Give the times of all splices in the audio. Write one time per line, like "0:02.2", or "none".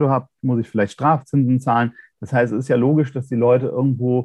none